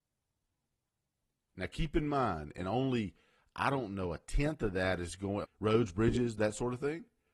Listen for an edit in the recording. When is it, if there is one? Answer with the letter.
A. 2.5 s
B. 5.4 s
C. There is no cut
B